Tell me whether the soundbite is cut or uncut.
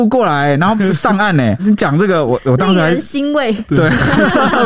cut